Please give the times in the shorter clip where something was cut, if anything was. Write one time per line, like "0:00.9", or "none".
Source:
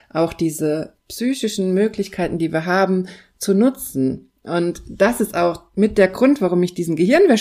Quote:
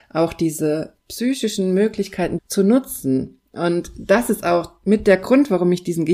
0:02.4